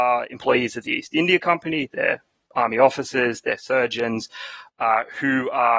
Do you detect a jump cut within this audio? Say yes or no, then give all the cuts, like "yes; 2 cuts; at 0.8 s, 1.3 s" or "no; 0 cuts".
no; 0 cuts